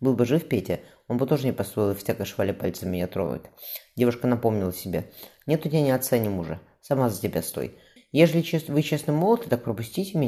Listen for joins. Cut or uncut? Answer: cut